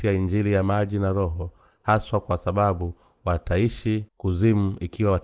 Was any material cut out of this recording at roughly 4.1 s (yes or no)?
yes